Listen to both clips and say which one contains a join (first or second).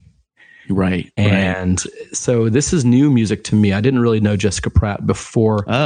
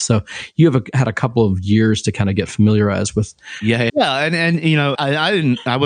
second